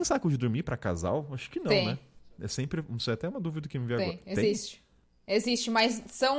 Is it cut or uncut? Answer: uncut